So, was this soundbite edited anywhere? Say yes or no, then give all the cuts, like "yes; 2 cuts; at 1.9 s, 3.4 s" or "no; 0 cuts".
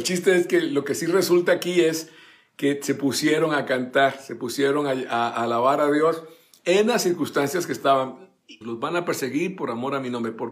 yes; 1 cut; at 8.6 s